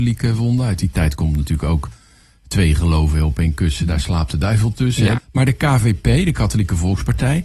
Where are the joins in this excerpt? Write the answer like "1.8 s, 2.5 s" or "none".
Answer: 5.2 s